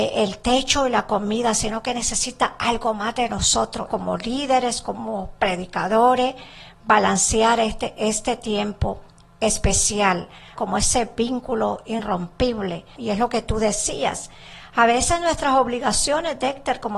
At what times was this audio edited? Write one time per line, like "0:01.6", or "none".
0:03.9
0:10.6
0:13.0